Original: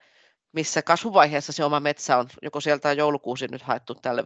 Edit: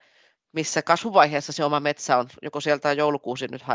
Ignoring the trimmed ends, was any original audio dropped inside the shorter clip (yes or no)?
no